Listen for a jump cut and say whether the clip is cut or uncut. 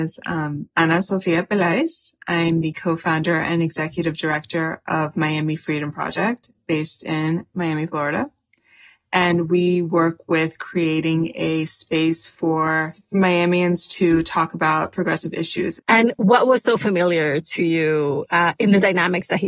cut